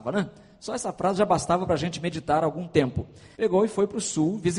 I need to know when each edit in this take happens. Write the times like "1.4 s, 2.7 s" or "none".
3.3 s